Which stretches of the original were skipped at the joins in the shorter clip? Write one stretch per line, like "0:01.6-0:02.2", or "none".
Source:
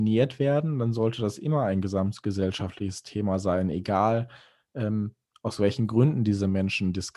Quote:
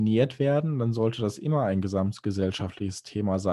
none